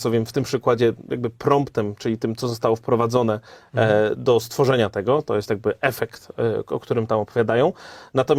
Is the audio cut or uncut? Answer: uncut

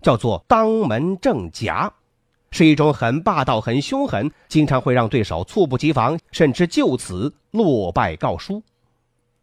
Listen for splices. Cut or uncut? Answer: cut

